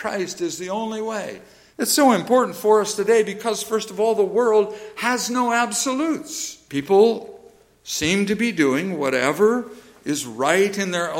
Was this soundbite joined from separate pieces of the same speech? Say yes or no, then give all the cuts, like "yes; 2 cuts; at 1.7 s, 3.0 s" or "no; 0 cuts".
yes; 2 cuts; at 1.7 s, 6.7 s